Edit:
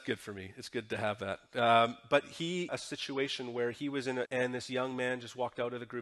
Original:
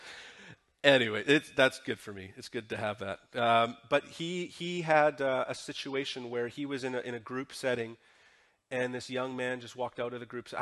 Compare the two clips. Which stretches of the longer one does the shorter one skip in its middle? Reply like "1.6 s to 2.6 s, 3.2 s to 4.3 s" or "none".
4.5 s to 5.5 s, 7.0 s to 8.7 s